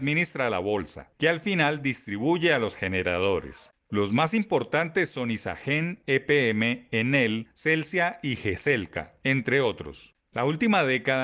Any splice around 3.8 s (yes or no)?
no